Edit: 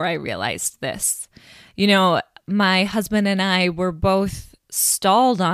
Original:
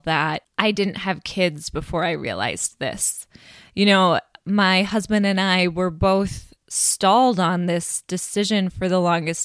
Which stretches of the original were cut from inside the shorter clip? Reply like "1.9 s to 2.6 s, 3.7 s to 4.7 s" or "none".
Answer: none